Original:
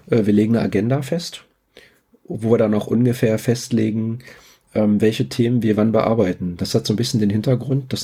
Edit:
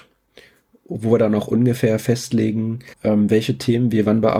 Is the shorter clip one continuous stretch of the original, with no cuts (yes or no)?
no